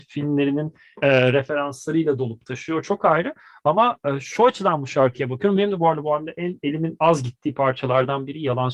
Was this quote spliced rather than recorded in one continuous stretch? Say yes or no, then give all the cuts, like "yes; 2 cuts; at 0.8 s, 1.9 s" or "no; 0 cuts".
no; 0 cuts